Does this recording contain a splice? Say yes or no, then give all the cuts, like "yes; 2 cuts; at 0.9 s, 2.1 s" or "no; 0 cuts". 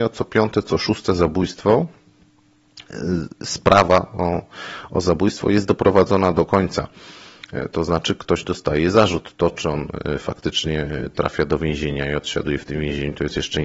no; 0 cuts